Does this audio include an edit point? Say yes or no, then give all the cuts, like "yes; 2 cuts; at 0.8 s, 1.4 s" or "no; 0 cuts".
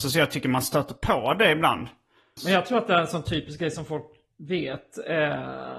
yes; 1 cut; at 2.4 s